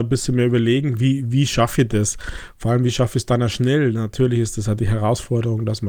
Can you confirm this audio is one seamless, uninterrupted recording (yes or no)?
yes